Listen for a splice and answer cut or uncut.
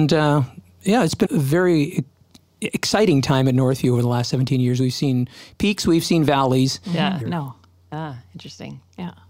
cut